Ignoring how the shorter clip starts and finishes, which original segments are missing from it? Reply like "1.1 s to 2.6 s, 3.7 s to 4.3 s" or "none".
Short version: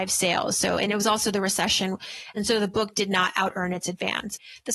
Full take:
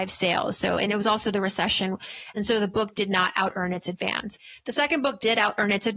none